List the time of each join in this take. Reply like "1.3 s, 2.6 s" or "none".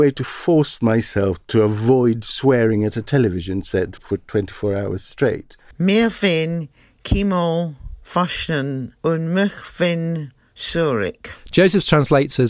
4.0 s, 5.7 s